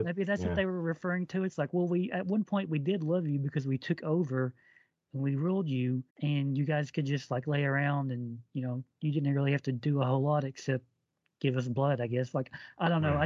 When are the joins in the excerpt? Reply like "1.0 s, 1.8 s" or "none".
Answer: 6.1 s